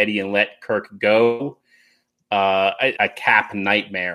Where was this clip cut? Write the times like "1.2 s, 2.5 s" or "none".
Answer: 3.0 s

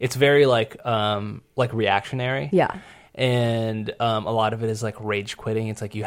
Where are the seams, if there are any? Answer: none

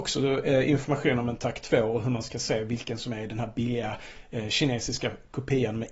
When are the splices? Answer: none

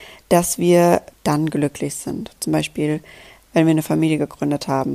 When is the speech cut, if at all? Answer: 1.1 s

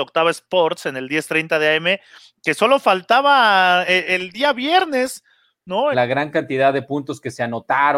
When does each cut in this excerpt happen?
5.9 s

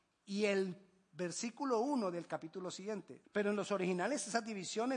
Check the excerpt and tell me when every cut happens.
3.2 s

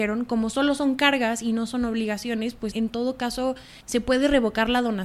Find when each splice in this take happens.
2.7 s

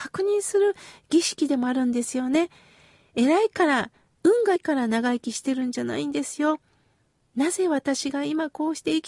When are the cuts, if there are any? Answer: 4.6 s

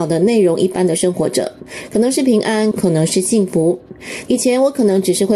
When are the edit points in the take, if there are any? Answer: 2.7 s, 4.3 s

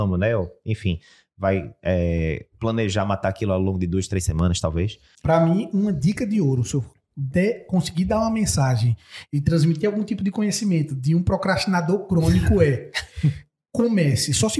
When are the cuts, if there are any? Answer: 5.1 s

